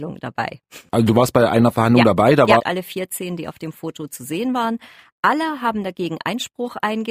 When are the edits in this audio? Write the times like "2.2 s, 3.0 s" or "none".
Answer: 2.6 s